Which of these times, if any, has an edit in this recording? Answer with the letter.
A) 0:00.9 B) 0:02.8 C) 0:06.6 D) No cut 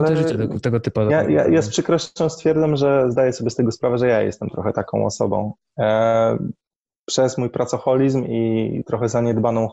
D